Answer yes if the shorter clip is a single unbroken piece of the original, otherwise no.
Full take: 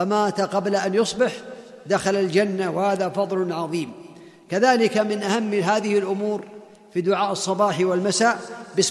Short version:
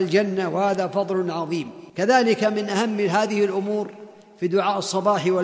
no